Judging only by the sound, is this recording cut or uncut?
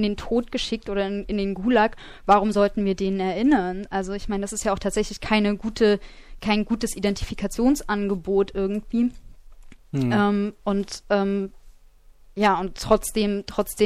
uncut